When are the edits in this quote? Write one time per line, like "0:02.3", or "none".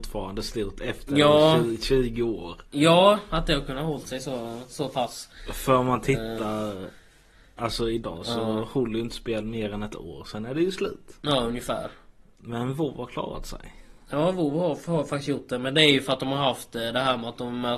none

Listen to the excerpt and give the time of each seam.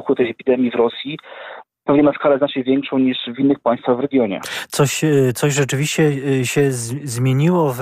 none

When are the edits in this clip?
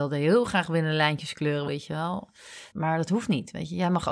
0:01.7
0:02.7

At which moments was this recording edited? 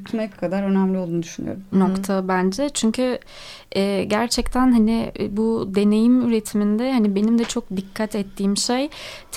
0:01.7

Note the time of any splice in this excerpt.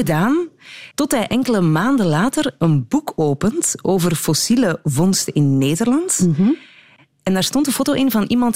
0:00.9

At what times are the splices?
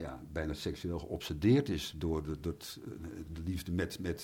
0:03.3

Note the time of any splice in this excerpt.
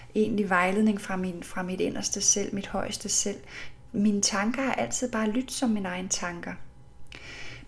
none

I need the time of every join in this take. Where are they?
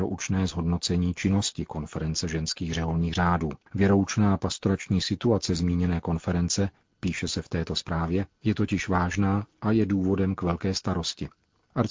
0:03.6

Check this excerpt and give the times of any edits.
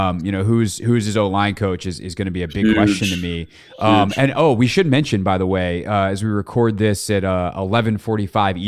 none

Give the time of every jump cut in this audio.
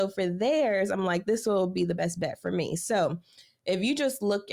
none

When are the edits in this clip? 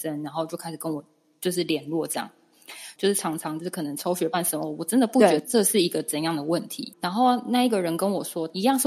0:03.0
0:06.9

